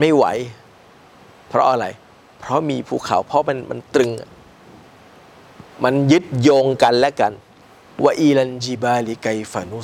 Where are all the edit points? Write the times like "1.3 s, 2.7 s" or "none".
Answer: 5.7 s